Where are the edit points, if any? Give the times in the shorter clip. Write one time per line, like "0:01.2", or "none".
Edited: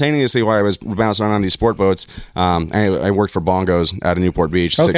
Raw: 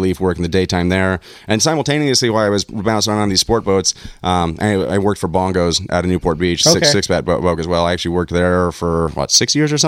none